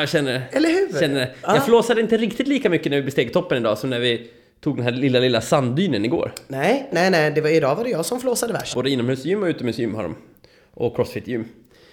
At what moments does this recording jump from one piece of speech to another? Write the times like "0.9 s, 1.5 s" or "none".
6.9 s, 8.7 s